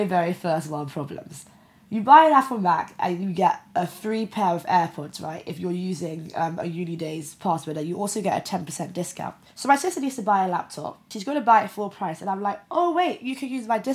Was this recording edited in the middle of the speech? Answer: no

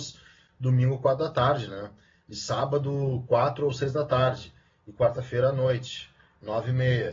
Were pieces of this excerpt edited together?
no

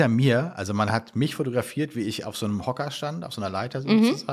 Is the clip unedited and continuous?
yes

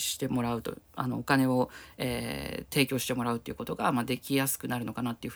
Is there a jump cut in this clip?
no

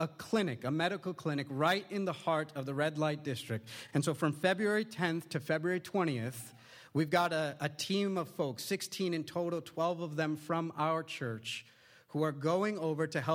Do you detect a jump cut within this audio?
no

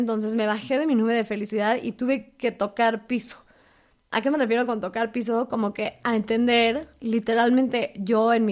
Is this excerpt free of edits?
yes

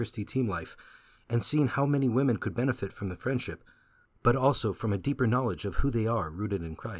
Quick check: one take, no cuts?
yes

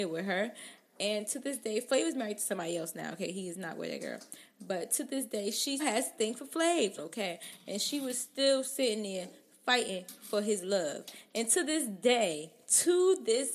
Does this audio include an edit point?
yes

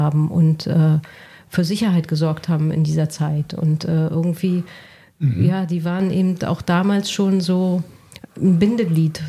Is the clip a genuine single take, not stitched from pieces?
yes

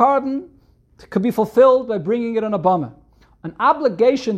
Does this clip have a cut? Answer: no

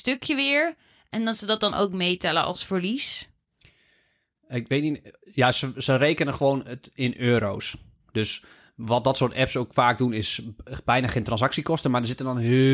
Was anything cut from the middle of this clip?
no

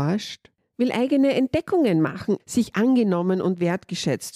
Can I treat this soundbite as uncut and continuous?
no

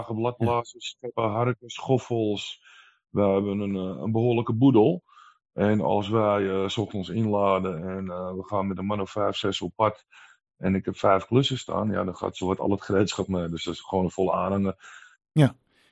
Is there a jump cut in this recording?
no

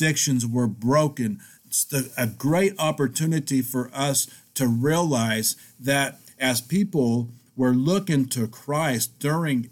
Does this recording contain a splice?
yes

